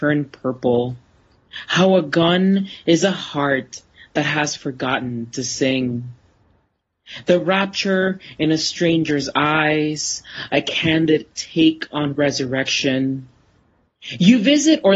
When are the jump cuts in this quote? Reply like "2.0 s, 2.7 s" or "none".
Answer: none